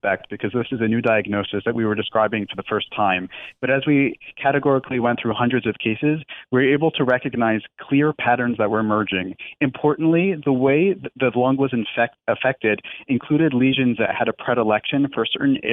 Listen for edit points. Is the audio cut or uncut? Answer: uncut